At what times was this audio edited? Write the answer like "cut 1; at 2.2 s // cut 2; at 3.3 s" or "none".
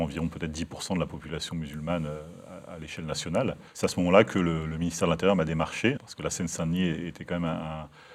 cut 1; at 3.7 s // cut 2; at 6.0 s

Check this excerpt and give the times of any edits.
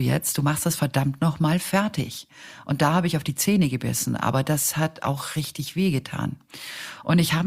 none

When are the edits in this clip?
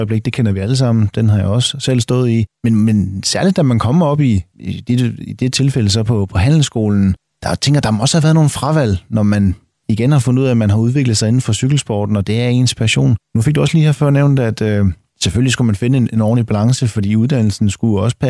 cut 1; at 13.2 s

